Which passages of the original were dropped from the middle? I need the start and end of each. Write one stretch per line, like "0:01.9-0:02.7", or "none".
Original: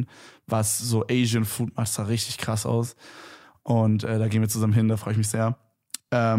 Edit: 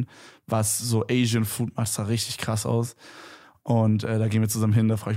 none